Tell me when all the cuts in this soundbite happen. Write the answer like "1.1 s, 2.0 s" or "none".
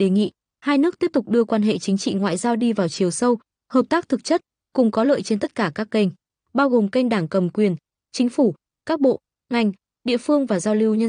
8.0 s